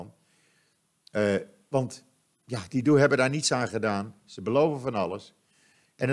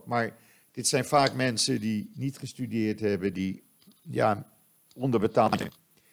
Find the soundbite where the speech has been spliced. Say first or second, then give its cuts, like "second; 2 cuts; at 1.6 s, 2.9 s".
second; 1 cut; at 3.3 s